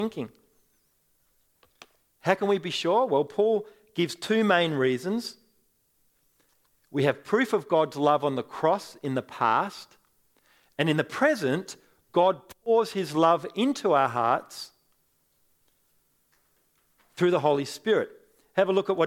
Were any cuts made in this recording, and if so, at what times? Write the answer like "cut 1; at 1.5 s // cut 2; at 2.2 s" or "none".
none